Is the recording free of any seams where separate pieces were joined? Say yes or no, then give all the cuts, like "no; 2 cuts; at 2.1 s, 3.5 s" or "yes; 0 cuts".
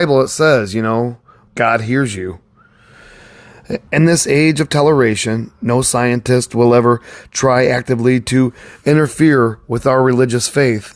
no; 2 cuts; at 1.5 s, 3.9 s